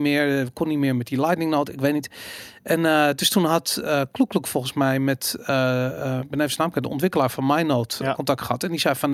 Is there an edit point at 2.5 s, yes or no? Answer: no